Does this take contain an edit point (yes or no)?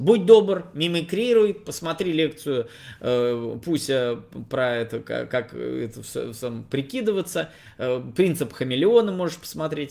no